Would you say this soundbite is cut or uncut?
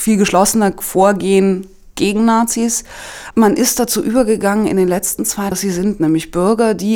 cut